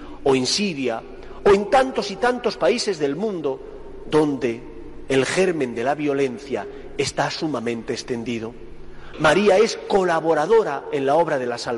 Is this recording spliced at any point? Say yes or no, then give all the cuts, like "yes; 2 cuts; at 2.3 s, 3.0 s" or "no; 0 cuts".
yes; 1 cut; at 9.1 s